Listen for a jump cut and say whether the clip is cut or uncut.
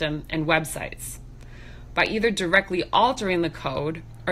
uncut